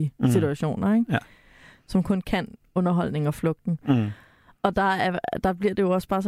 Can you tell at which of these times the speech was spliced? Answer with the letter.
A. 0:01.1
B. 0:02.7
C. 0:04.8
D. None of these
D